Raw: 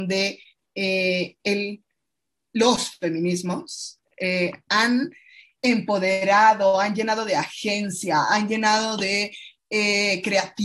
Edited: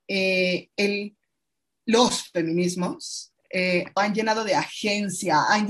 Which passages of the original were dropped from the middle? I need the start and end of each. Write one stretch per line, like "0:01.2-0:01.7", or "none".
0:04.6-0:06.8